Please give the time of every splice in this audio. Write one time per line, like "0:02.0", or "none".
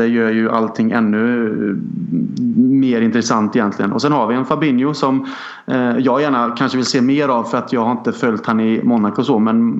none